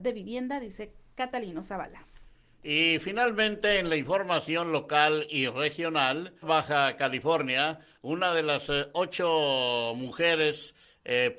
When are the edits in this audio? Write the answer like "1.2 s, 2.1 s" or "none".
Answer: 6.4 s